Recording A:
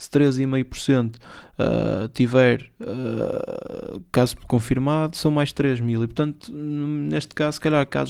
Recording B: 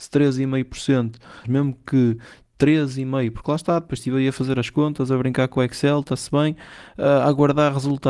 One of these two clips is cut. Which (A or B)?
B